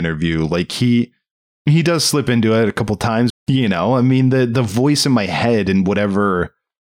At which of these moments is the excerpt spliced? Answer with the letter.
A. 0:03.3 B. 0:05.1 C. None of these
A